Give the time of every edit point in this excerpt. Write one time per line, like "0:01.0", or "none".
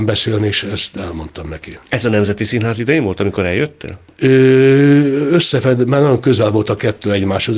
none